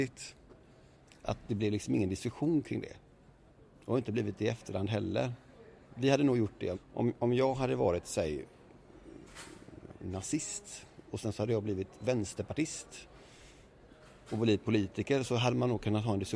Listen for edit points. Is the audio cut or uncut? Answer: cut